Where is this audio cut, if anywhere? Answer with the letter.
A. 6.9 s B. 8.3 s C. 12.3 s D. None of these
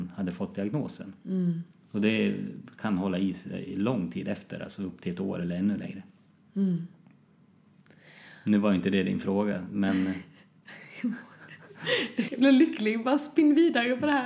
C